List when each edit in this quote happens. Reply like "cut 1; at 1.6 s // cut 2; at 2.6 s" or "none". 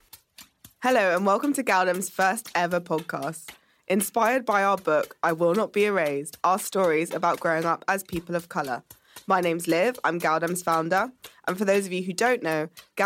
none